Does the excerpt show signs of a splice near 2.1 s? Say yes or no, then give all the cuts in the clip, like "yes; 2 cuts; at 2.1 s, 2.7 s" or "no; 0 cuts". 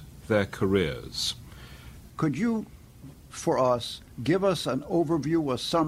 yes; 2 cuts; at 2.1 s, 4.1 s